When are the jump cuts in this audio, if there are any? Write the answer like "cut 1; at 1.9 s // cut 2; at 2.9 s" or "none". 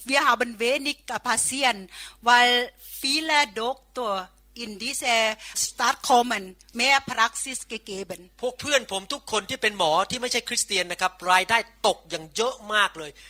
cut 1; at 5.5 s